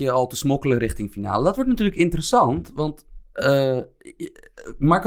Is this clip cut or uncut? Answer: uncut